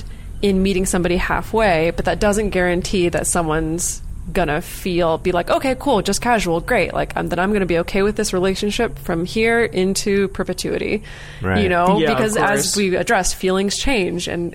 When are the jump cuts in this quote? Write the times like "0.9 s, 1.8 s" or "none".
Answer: none